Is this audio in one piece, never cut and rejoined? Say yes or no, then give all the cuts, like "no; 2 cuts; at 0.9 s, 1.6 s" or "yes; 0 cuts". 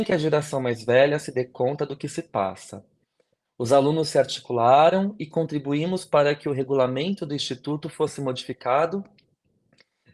no; 1 cut; at 3.5 s